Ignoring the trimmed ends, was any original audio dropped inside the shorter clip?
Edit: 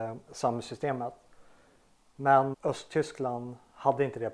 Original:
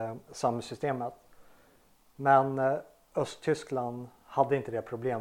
yes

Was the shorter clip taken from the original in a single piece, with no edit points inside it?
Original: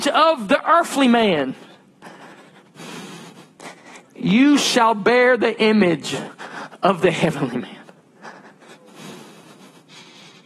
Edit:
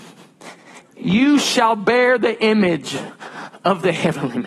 yes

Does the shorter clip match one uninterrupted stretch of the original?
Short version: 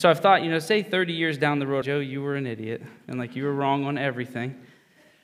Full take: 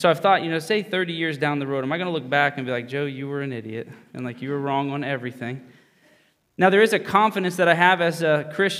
no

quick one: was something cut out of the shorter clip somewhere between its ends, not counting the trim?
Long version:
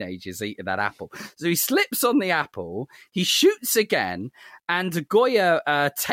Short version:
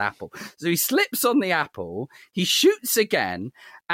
no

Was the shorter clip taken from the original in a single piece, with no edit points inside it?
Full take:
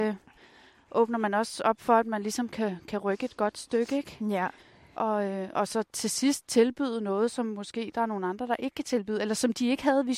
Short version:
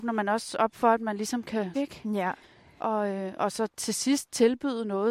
no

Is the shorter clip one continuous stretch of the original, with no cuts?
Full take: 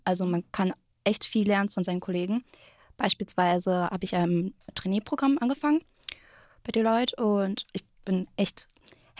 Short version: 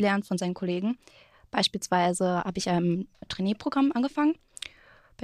yes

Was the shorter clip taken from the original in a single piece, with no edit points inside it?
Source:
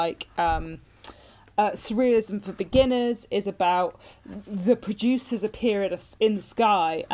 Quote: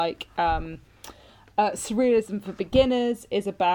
yes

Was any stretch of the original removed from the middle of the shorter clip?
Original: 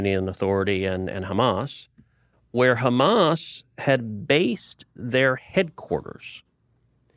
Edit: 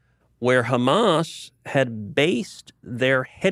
no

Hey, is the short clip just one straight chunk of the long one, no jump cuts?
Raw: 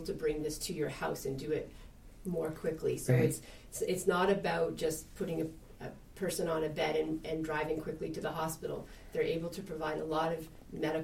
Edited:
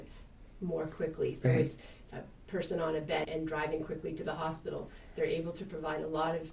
no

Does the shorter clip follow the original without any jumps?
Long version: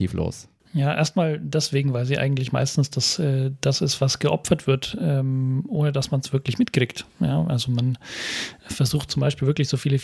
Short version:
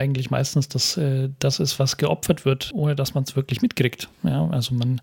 no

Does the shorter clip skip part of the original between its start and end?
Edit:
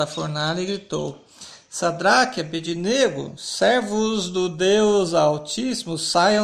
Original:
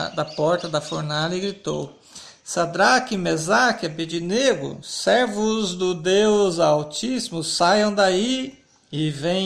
yes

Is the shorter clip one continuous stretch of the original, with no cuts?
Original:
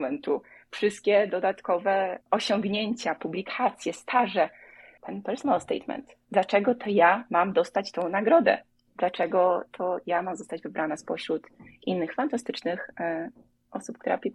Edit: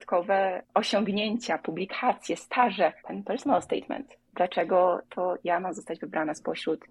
no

